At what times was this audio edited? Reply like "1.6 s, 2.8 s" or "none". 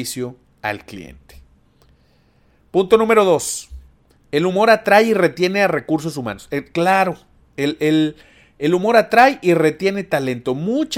none